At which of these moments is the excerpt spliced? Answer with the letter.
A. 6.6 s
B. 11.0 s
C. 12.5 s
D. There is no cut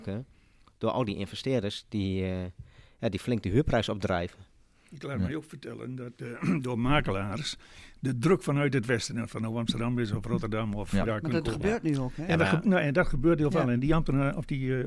B